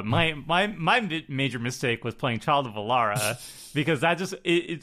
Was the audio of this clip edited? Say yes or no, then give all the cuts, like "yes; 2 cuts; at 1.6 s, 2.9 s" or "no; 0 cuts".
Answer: no; 0 cuts